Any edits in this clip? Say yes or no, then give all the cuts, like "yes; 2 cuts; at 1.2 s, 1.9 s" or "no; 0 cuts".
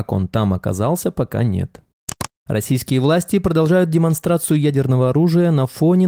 yes; 1 cut; at 2.4 s